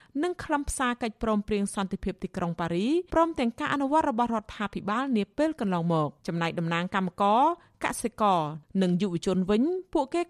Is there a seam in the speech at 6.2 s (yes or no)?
yes